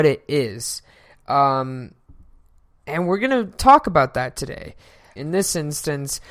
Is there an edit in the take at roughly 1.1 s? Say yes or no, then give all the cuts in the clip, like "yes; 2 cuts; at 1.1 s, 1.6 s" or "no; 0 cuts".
no; 1 cut; at 5.2 s